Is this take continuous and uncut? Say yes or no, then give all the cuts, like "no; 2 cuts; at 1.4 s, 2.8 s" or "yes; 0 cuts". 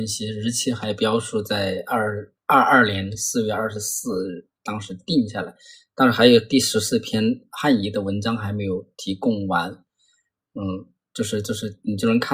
yes; 0 cuts